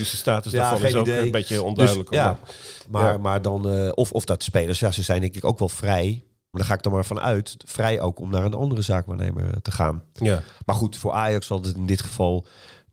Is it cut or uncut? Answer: cut